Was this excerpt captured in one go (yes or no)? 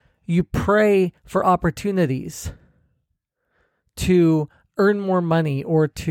yes